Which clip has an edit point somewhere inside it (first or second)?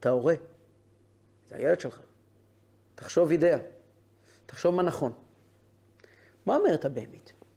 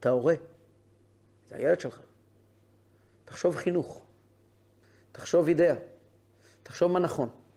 first